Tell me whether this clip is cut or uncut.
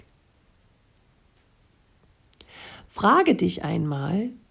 uncut